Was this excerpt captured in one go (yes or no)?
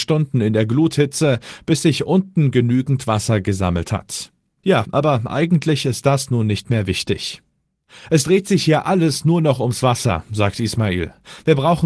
no